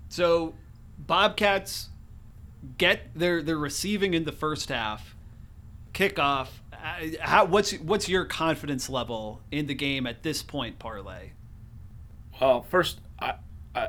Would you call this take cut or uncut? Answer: uncut